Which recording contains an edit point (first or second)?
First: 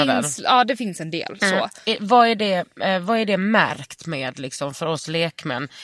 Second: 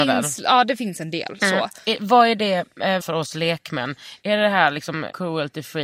second